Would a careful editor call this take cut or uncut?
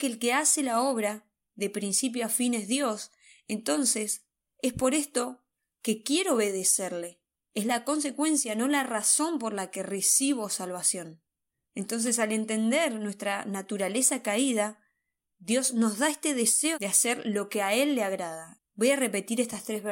cut